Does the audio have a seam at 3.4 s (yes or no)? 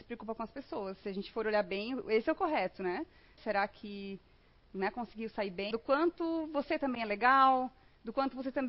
yes